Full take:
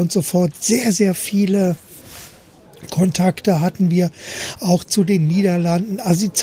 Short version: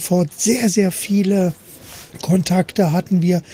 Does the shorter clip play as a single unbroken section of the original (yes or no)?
no